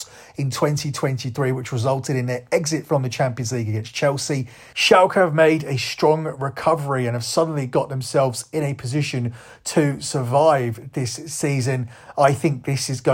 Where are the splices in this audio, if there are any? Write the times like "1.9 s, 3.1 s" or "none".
4.7 s